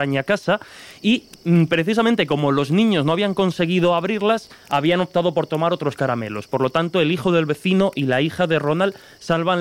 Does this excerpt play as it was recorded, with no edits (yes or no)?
yes